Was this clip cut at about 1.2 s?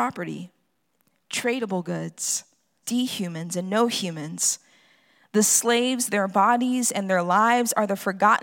no; 1 cut; at 2.8 s

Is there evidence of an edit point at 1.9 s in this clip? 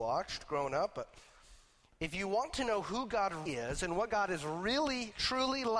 no; 1 cut; at 3.5 s

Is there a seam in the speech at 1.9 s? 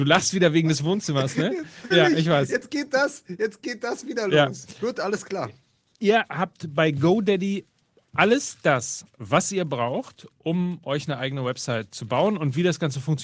yes; 1 cut; at 1.9 s

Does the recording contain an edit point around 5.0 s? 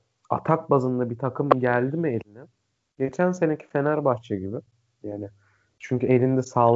yes; 1 cut; at 5.0 s

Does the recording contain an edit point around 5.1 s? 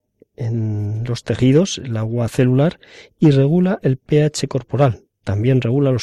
no; 0 cuts

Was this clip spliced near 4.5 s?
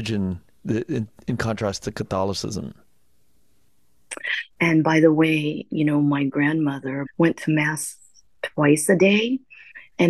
yes; 2 cuts; at 4.5 s, 7.1 s

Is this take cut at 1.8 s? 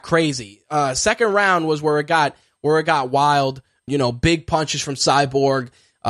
no; 1 cut; at 3.9 s

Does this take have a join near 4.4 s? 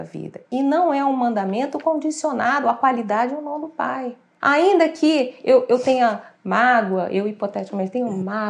yes; 1 cut; at 4.4 s

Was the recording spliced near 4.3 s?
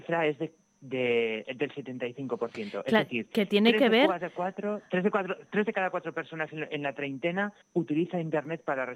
no; 1 cut; at 7.6 s

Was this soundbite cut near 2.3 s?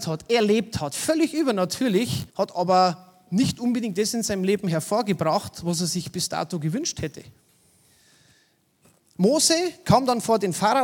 yes; 1 cut; at 2.3 s

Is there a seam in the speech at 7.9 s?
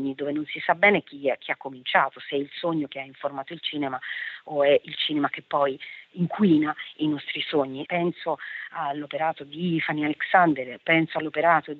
yes; 1 cut; at 7.9 s

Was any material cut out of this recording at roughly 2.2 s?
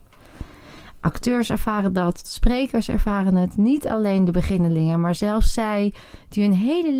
yes; 1 cut; at 2.2 s

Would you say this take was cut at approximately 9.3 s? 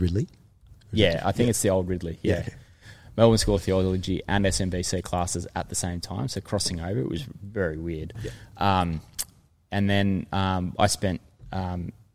no; 0 cuts

